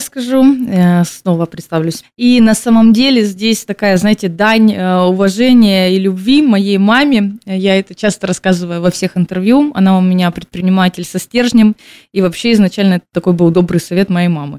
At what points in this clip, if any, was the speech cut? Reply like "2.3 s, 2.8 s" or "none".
2.0 s